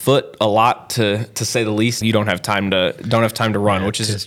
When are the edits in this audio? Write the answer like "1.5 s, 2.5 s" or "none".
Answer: 2.0 s